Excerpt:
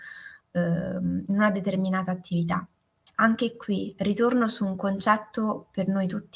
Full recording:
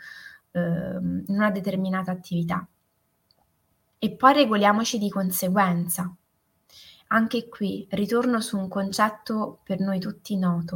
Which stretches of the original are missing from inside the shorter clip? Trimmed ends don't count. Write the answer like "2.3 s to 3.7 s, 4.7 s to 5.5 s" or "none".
3.1 s to 7.0 s